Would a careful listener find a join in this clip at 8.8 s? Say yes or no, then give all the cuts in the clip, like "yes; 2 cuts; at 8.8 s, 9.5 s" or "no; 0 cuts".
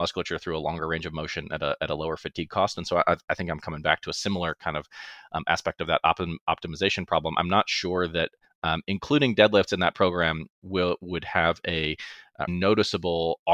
no; 1 cut; at 12.5 s